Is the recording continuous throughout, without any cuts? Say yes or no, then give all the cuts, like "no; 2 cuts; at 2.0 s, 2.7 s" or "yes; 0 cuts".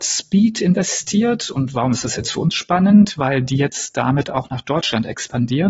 yes; 0 cuts